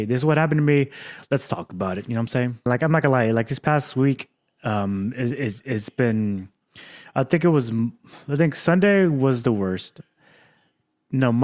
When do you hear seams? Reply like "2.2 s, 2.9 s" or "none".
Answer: 2.7 s